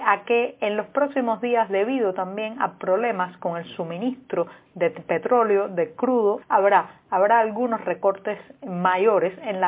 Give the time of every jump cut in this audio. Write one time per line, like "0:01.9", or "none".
0:06.4